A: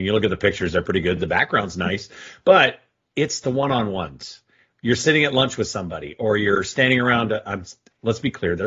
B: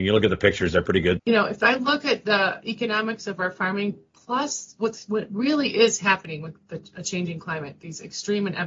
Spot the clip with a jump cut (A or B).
B